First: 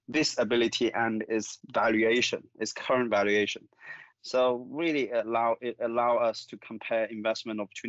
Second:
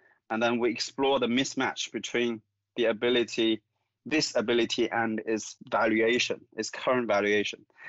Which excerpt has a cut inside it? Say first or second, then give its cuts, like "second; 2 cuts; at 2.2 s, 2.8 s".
first; 1 cut; at 4.1 s